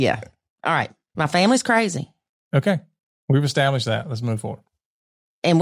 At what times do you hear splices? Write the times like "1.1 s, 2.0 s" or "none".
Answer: 1.1 s